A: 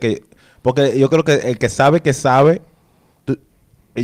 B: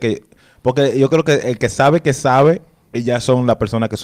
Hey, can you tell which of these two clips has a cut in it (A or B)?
B